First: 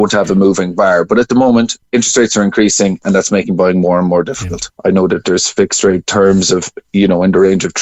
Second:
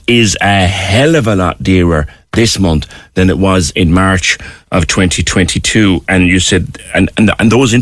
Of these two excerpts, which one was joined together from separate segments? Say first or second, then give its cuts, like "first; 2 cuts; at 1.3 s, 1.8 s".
first; 2 cuts; at 1.8 s, 4.7 s